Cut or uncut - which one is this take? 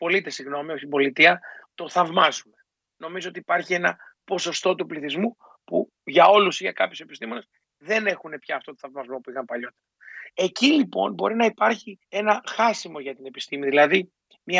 cut